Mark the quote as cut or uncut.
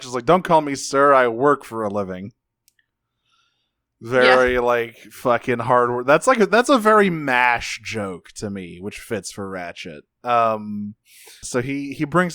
cut